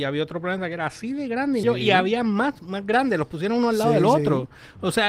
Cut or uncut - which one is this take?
cut